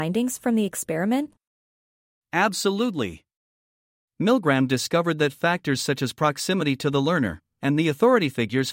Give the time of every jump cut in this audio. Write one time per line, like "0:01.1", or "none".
0:07.5